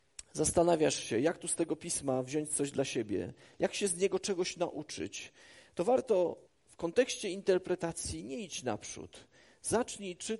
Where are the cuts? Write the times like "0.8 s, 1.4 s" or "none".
6.5 s